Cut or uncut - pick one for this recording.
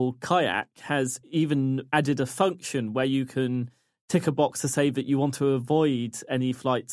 uncut